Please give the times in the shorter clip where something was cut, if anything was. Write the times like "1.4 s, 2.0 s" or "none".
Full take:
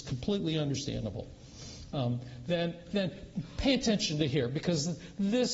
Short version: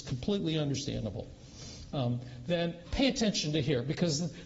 2.8 s